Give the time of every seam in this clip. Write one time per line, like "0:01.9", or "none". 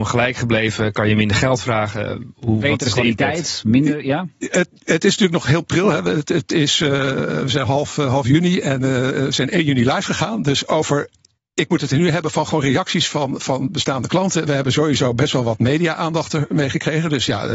none